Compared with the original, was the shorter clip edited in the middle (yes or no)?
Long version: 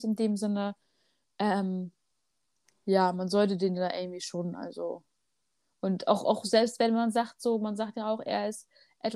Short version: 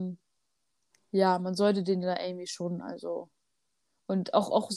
no